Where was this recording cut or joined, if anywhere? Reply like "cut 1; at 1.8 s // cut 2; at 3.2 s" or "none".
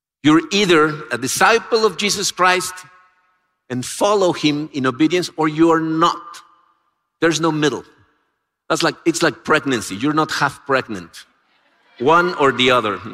none